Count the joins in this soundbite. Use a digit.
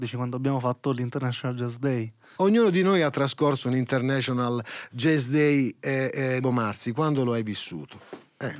2